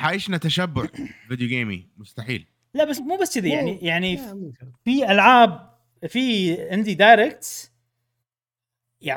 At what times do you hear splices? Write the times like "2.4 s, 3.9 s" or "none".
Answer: 3.0 s, 4.8 s